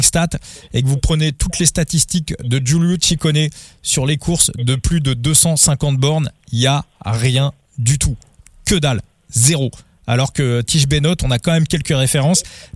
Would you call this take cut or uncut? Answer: uncut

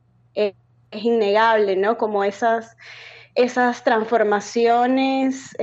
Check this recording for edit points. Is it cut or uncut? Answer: uncut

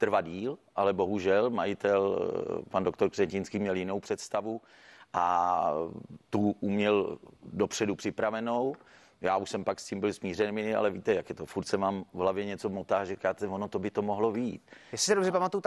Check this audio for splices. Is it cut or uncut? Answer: uncut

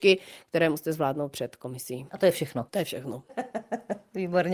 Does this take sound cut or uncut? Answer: cut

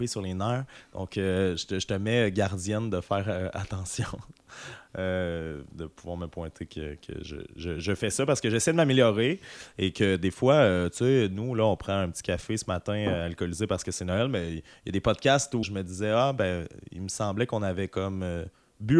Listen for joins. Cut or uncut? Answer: cut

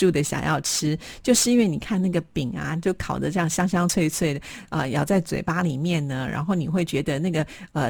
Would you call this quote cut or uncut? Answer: uncut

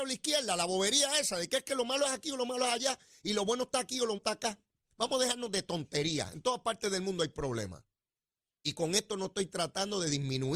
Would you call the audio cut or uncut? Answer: cut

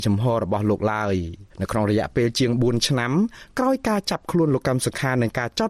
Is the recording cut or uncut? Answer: cut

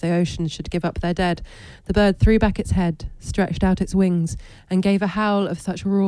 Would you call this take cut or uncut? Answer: uncut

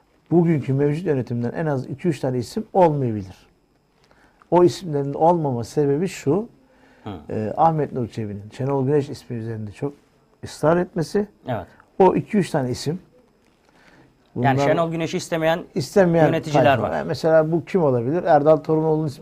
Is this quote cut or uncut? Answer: uncut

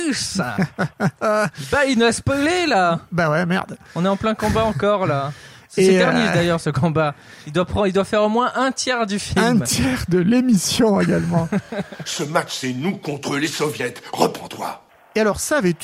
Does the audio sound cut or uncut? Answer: uncut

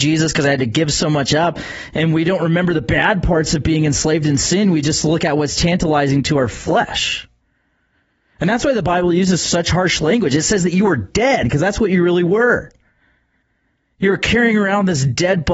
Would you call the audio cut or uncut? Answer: uncut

